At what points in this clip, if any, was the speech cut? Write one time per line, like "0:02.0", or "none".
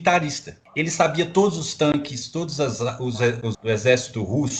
0:03.5